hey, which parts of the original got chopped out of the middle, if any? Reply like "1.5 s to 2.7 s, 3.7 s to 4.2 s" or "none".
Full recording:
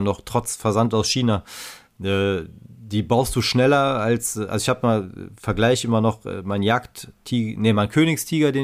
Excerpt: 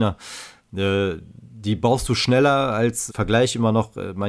4.3 s to 5.4 s